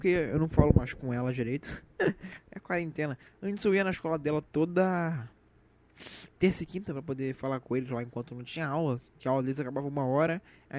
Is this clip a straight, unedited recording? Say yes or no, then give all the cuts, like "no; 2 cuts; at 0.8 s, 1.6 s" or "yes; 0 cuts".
yes; 0 cuts